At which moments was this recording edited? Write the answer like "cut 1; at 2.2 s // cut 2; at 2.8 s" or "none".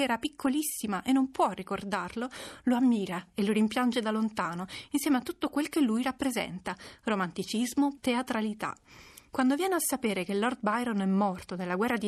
cut 1; at 8.0 s